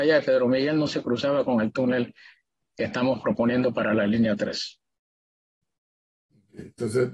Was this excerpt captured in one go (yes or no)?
yes